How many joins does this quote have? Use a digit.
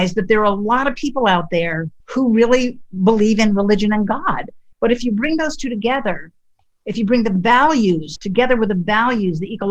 3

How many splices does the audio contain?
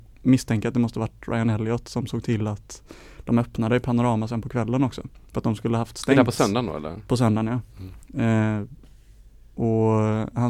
0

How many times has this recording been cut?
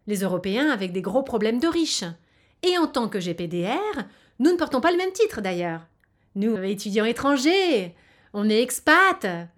1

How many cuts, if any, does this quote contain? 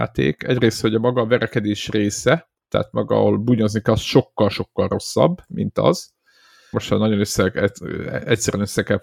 1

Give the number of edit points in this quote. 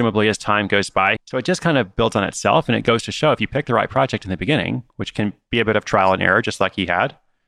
1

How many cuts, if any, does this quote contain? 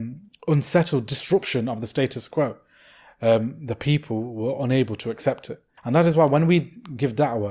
1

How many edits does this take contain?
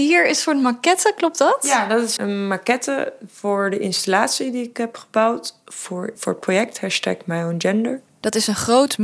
2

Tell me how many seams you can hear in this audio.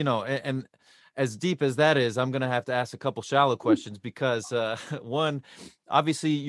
0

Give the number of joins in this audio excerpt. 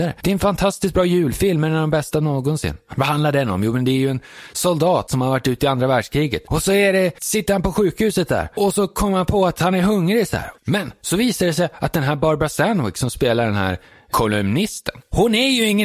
1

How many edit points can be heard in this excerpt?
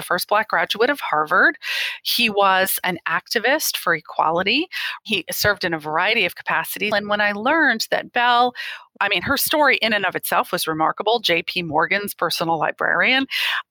1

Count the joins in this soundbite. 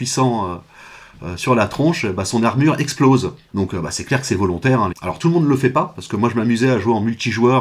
2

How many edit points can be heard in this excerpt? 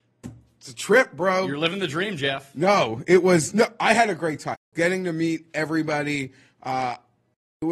1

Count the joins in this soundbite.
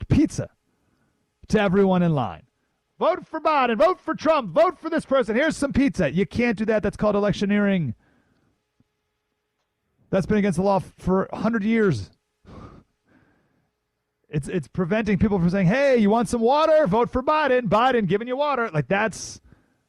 0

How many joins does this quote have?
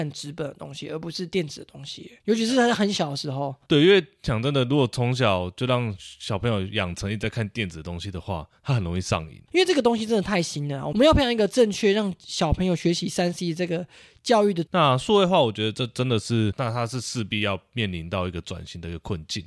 2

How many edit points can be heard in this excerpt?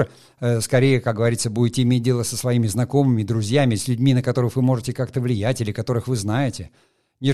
0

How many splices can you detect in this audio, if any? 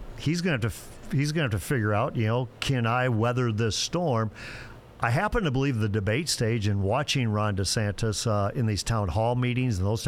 0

